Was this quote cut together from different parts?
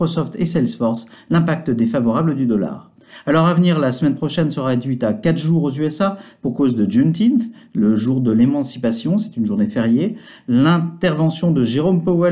no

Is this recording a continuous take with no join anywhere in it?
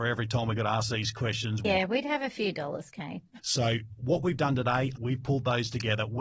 no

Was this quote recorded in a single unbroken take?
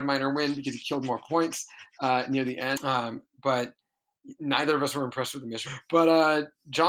no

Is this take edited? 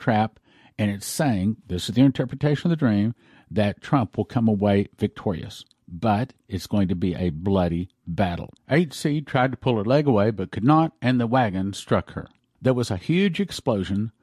no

